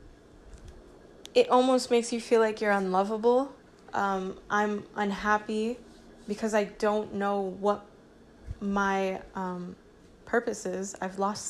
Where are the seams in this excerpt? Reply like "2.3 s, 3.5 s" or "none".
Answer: 3.9 s